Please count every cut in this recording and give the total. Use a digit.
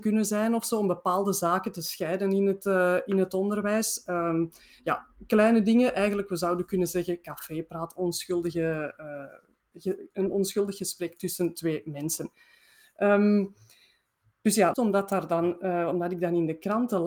1